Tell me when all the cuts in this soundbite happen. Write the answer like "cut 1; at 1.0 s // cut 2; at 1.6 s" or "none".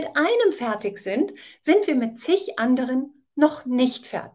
none